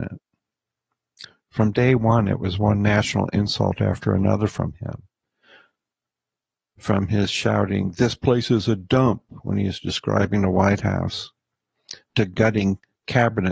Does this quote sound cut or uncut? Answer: uncut